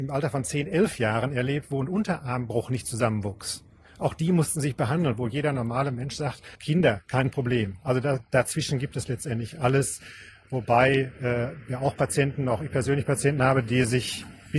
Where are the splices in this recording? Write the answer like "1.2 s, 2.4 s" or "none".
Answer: 6.5 s

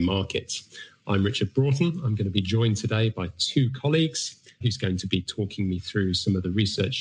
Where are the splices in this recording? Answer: 4.6 s

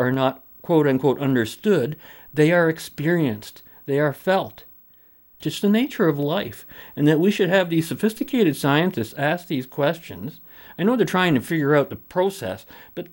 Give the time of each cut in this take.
5.4 s

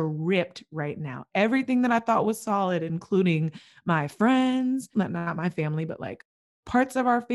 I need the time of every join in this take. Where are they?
4.9 s

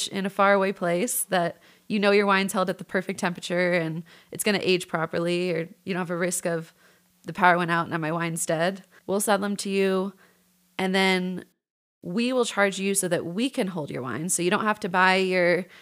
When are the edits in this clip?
9.0 s

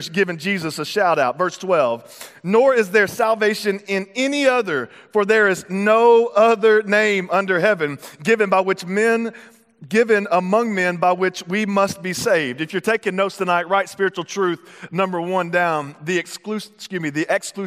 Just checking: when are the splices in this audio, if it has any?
none

